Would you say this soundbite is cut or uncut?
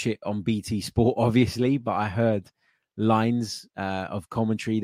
uncut